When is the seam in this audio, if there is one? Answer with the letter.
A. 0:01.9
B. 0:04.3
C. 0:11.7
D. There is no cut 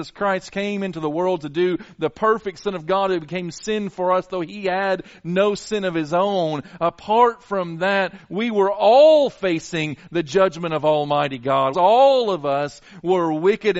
C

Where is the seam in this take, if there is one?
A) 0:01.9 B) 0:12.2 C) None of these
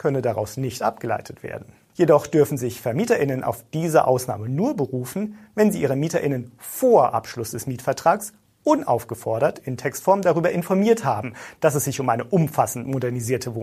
A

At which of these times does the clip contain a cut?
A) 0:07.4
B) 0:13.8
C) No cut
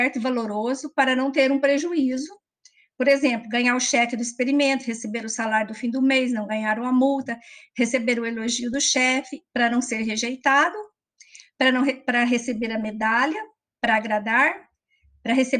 C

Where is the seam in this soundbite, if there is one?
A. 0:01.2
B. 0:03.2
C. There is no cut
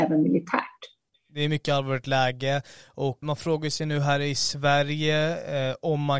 B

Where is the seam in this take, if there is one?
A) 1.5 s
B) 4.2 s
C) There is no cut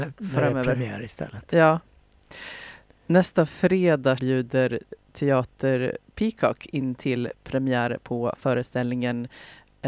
B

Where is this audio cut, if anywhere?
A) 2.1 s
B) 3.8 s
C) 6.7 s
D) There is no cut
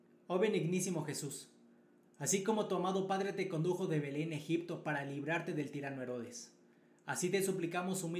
D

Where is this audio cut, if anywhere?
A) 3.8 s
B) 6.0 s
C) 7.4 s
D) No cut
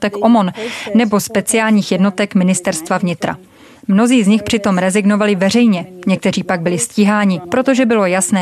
C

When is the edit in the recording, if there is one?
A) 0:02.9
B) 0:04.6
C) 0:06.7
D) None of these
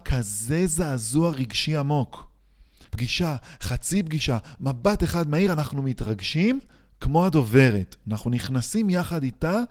A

